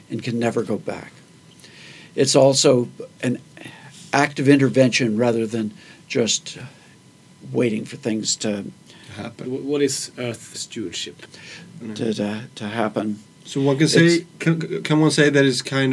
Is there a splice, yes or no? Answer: yes